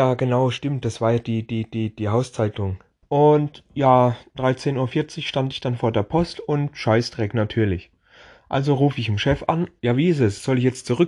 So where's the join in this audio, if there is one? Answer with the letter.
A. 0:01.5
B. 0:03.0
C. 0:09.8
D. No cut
B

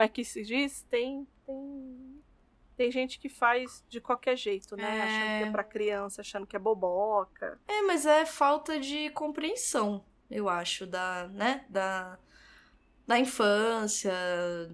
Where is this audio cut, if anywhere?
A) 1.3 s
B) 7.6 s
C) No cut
C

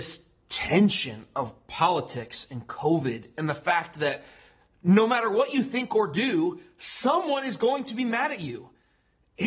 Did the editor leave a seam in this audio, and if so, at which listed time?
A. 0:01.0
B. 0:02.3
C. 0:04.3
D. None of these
D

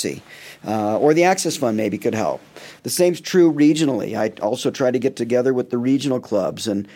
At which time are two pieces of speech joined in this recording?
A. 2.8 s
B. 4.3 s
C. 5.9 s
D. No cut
A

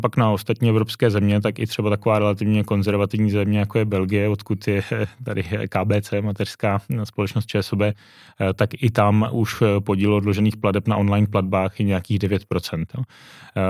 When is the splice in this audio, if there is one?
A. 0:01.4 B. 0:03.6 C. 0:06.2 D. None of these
D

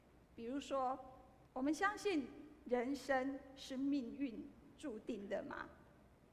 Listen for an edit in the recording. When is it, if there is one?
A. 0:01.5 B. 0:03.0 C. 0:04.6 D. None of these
A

